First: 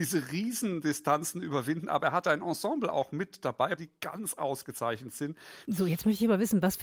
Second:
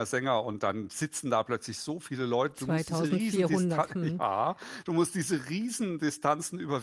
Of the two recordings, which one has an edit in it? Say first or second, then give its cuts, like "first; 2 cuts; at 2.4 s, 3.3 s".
first; 2 cuts; at 3.8 s, 5.6 s